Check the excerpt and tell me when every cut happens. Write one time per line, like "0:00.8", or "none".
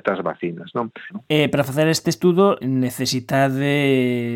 0:01.1
0:02.6